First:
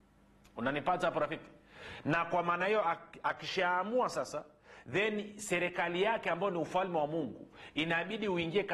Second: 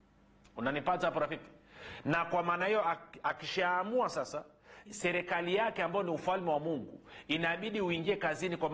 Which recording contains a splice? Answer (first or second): second